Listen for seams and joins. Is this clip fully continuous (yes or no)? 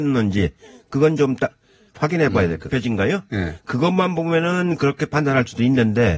no